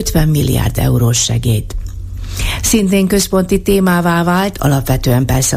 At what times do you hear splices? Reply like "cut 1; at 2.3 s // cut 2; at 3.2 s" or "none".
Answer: none